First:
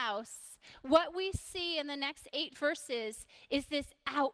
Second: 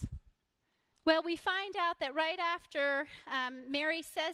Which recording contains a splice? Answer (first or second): second